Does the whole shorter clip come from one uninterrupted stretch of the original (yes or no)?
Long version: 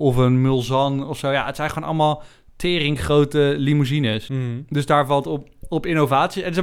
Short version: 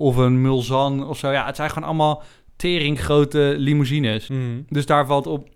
yes